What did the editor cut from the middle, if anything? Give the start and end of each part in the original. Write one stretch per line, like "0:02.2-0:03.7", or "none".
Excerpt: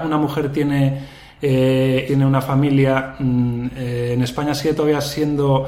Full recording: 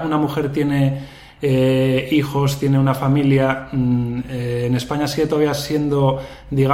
0:02.1-0:02.6

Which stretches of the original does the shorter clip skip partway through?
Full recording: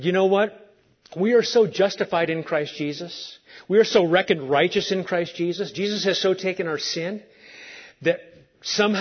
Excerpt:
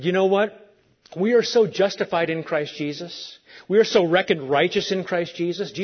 none

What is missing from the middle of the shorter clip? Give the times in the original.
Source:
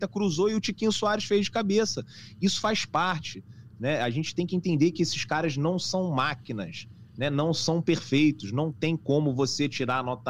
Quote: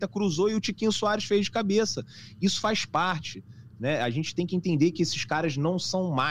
none

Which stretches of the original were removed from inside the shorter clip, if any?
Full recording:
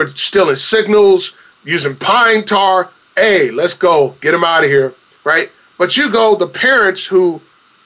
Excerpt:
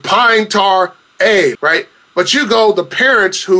0:03.5-0:05.2

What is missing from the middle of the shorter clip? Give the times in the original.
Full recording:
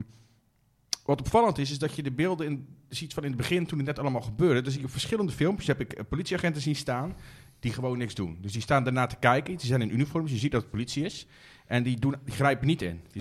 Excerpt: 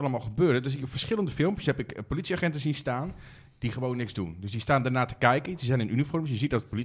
none

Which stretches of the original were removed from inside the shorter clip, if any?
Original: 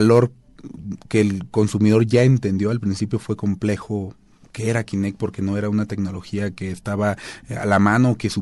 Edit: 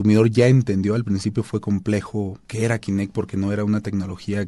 0:04.2-0:04.5

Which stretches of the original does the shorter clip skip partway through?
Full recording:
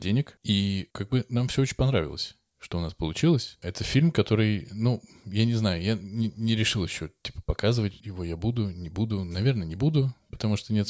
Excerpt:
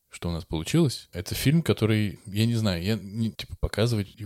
0:04.7-0:05.2
0:06.3-0:07.2

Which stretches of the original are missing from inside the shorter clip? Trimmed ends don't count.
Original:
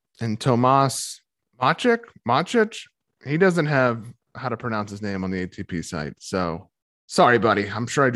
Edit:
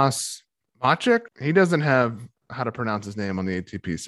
0:02.1-0:03.1

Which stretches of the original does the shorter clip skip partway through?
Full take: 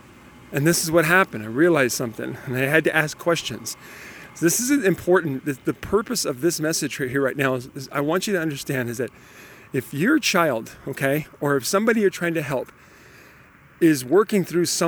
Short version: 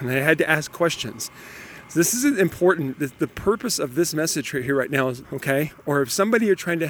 0:07.7-0:10.8

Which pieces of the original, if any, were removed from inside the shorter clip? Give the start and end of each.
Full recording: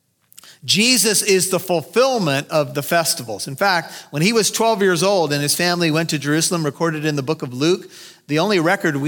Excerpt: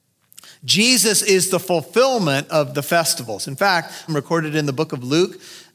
0:04.1-0:06.6

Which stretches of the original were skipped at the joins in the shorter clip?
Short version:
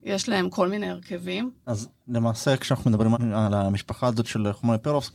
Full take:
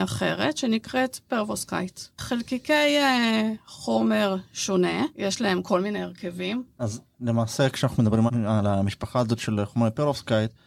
none

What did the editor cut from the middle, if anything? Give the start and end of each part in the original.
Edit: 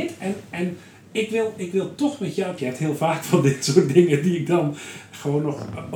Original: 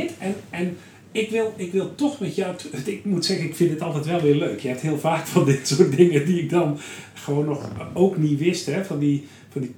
0:02.6-0:04.6

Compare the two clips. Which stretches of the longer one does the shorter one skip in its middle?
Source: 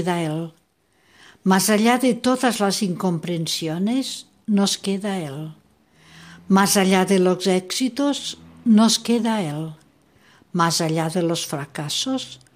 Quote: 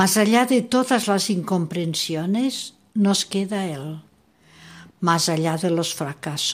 0:06.4-0:10.4

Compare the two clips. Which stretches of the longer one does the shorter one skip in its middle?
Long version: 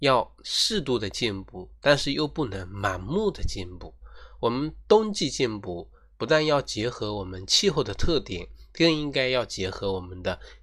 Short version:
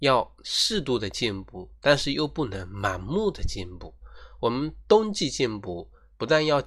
none

